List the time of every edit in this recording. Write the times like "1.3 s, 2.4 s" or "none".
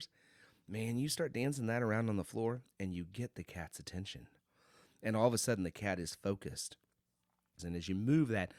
7.6 s